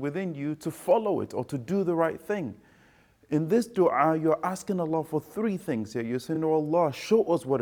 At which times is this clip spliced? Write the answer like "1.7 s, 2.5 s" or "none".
none